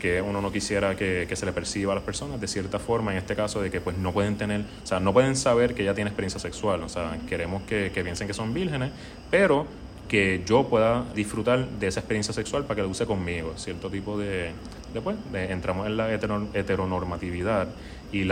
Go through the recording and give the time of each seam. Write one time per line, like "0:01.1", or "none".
0:11.1